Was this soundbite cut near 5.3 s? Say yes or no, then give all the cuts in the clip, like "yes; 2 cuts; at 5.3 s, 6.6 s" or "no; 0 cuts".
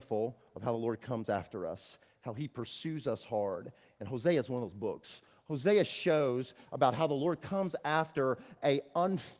no; 0 cuts